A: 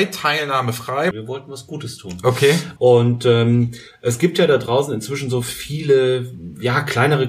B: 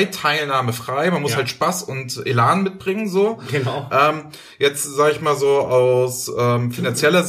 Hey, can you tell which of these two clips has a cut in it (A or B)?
A